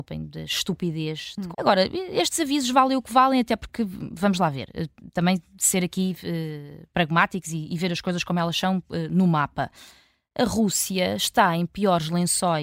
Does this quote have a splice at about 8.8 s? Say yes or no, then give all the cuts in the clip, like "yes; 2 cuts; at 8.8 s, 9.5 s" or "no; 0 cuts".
no; 1 cut; at 1.5 s